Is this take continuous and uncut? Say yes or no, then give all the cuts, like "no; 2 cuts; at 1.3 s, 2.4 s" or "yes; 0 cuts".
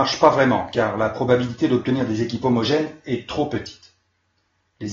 yes; 0 cuts